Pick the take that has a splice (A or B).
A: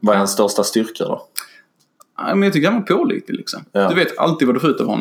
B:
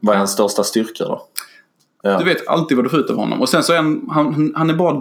B